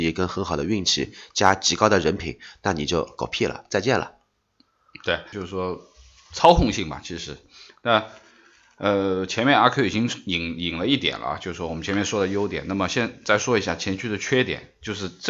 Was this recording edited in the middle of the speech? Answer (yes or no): yes